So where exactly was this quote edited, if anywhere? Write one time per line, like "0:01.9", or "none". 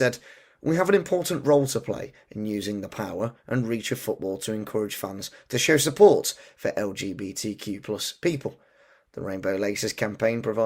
none